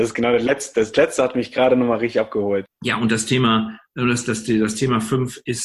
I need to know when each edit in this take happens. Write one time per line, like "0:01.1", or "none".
0:02.6